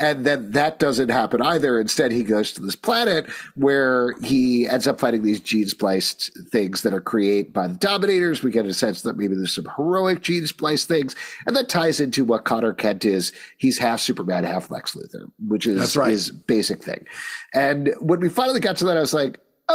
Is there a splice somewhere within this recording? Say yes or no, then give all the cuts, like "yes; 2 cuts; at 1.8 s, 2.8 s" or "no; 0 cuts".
no; 0 cuts